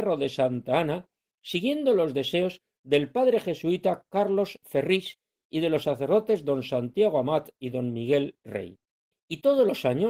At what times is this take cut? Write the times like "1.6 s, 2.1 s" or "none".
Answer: 9.1 s